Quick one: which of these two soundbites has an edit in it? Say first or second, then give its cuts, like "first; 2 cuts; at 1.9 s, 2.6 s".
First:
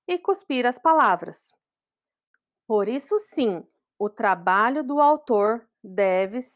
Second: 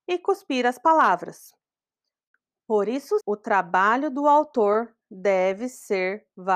second; 1 cut; at 3.2 s